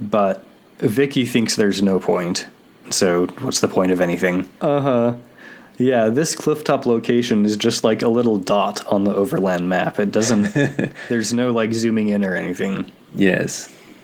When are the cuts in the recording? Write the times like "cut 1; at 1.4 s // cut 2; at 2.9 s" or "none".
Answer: cut 1; at 2.8 s // cut 2; at 4.6 s